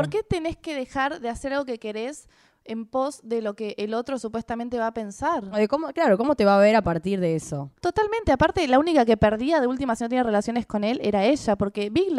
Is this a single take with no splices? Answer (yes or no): yes